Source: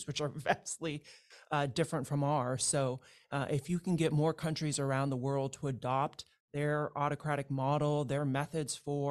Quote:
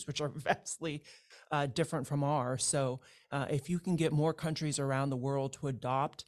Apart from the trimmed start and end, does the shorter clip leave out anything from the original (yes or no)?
no